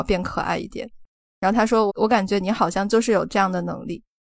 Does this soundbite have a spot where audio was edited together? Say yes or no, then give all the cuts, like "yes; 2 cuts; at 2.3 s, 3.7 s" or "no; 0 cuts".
yes; 1 cut; at 1.9 s